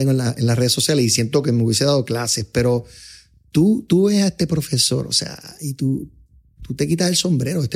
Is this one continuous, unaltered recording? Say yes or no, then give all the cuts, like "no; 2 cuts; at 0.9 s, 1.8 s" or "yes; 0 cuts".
yes; 0 cuts